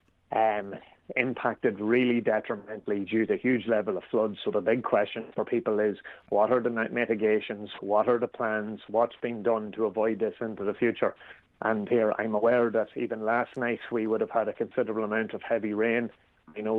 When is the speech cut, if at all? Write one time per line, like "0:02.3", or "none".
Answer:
none